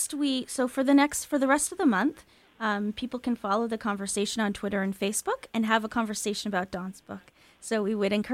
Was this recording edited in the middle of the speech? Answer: no; 0 cuts

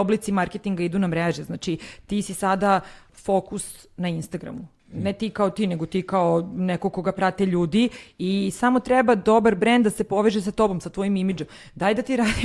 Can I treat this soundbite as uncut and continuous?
no; 1 cut; at 3.1 s

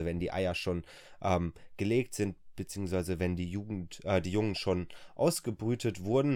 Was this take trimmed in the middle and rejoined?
no; 0 cuts

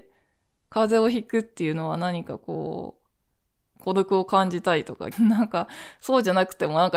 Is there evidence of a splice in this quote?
yes; 1 cut; at 5.1 s

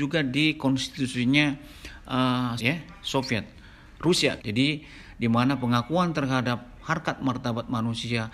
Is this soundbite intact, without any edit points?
no; 2 cuts; at 2.6 s, 4.4 s

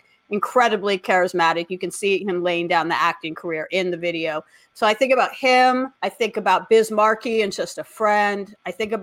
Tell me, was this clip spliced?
yes; 1 cut; at 6.0 s

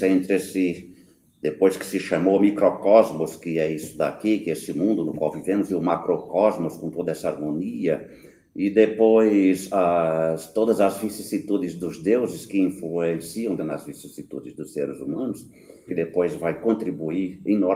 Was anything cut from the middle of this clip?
yes; 2 cuts; at 13.6 s, 15.9 s

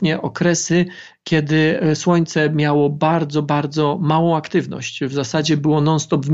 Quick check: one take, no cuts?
yes; 0 cuts

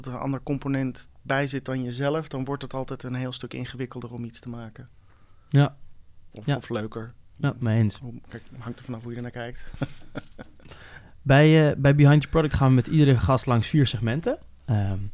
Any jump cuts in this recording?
no; 0 cuts

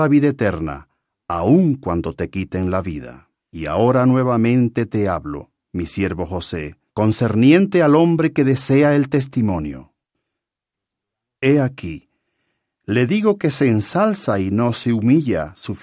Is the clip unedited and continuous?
no; 2 cuts; at 3.4 s, 6.9 s

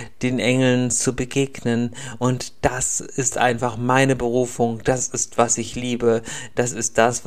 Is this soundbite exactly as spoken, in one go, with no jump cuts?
yes; 0 cuts

